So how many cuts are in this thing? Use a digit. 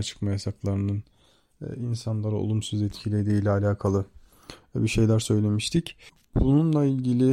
0